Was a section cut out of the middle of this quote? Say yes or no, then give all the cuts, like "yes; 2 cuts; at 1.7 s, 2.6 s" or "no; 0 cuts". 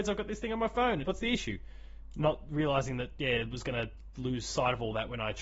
yes; 1 cut; at 1.0 s